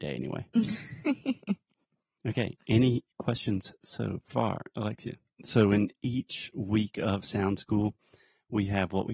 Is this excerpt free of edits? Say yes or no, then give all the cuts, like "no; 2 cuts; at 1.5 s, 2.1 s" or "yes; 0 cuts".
no; 1 cut; at 5.3 s